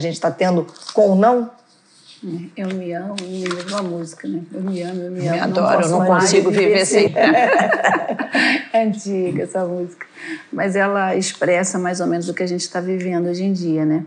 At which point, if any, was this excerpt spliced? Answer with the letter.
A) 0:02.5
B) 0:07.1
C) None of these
B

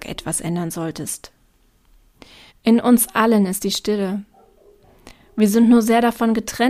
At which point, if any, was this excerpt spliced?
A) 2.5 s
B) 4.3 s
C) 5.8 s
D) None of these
A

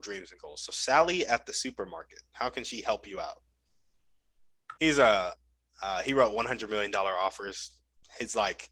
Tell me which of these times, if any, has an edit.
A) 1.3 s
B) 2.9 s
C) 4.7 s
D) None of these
C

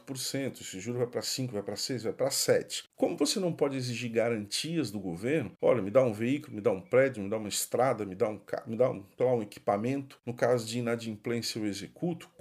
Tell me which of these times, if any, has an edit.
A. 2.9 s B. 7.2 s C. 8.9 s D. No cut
A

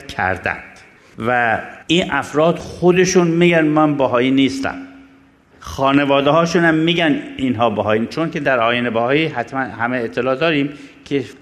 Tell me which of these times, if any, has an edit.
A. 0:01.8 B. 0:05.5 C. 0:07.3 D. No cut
A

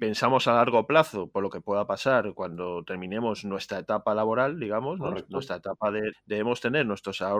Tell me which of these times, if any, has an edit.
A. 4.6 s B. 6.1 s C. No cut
B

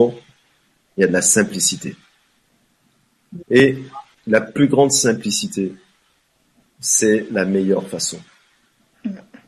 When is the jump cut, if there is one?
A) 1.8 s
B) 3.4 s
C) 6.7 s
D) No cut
B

